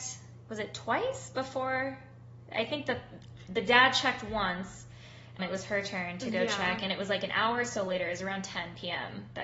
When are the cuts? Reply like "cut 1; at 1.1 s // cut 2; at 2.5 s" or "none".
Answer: cut 1; at 5.4 s